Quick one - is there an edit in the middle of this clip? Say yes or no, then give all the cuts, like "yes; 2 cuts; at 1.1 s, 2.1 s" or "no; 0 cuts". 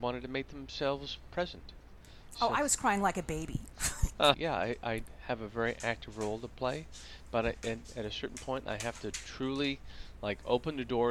yes; 1 cut; at 4.3 s